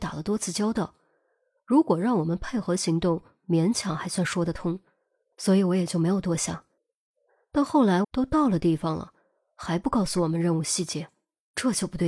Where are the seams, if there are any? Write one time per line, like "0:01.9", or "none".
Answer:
0:08.0